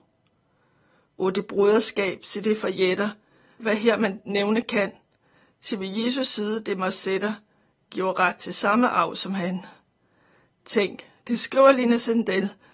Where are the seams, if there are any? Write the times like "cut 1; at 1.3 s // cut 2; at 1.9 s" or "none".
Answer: cut 1; at 3.6 s

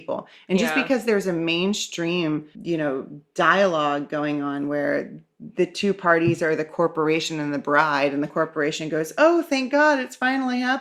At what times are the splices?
cut 1; at 2.5 s

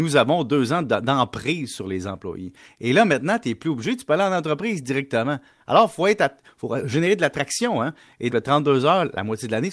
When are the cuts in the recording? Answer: cut 1; at 8.3 s

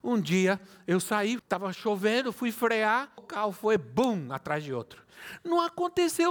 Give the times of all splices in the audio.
cut 1; at 1.4 s // cut 2; at 3.2 s

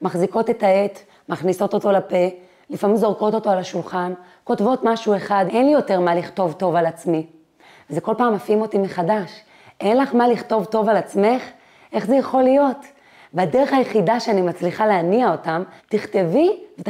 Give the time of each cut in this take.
cut 1; at 5.5 s // cut 2; at 15.8 s

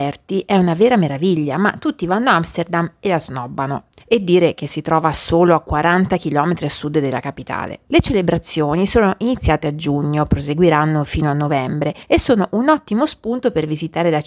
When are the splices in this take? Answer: cut 1; at 7.9 s

